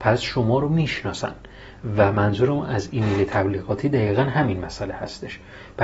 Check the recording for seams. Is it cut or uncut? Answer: uncut